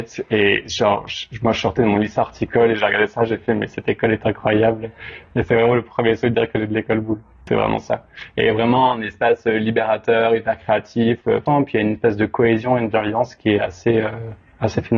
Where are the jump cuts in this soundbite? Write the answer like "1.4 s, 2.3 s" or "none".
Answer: none